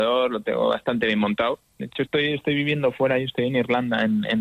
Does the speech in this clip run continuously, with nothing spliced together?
yes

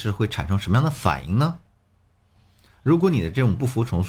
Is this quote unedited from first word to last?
yes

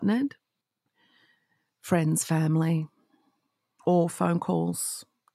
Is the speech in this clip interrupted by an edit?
no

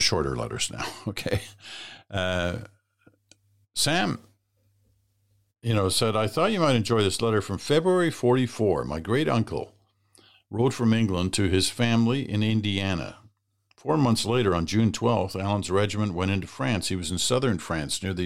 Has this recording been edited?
no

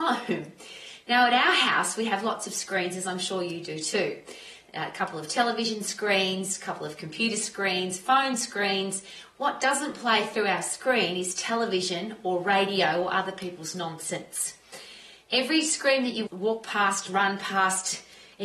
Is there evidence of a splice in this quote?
yes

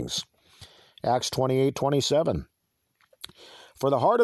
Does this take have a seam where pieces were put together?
no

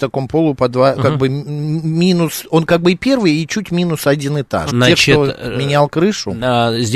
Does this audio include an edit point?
yes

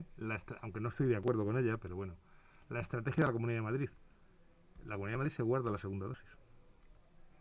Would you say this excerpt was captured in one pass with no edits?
yes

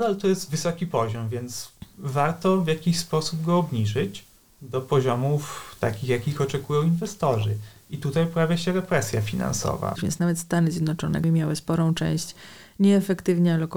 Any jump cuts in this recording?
yes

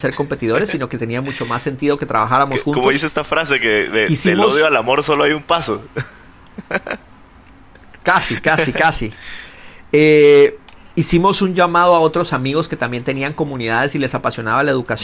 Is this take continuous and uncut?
yes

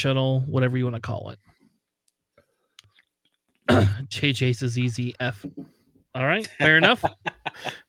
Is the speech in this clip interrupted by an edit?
no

